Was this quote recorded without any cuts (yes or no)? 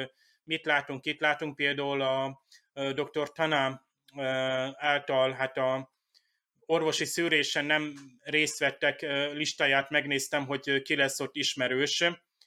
yes